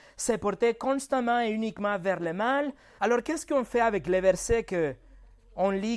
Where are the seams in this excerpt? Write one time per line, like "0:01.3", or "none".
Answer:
0:03.0